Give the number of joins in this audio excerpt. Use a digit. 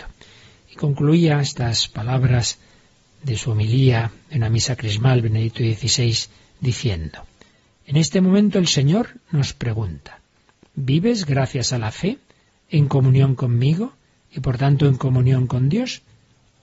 0